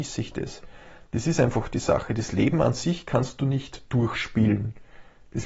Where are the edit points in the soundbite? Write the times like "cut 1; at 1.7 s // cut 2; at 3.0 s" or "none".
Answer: none